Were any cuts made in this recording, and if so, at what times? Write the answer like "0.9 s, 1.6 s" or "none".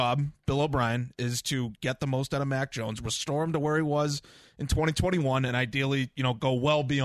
none

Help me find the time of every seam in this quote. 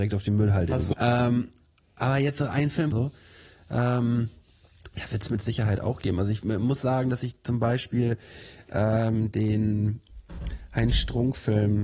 0.9 s, 2.9 s

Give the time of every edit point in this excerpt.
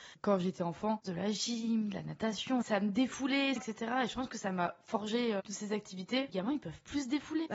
1.0 s, 3.6 s

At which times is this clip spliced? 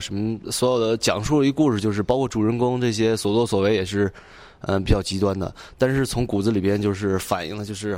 none

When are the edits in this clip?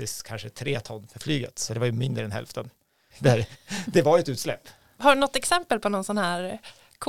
3.1 s, 5.0 s

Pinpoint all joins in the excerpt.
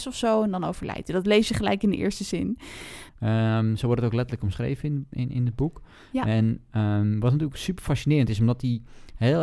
3.1 s

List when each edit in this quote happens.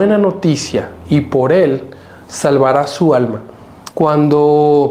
3.9 s

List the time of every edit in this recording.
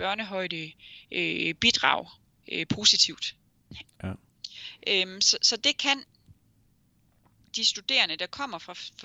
3.8 s

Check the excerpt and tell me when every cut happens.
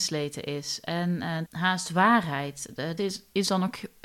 1.5 s, 3.0 s

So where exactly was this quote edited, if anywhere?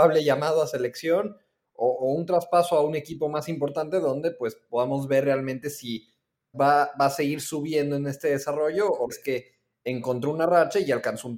6.5 s, 9.1 s

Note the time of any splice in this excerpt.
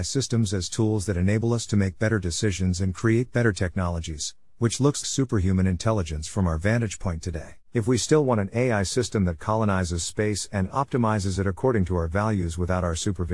5.0 s, 7.6 s

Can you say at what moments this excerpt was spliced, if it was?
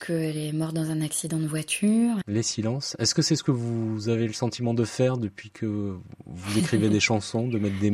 2.2 s

